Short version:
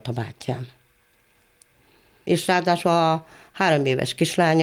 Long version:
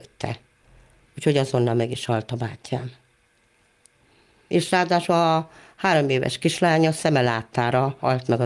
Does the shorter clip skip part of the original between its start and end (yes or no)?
no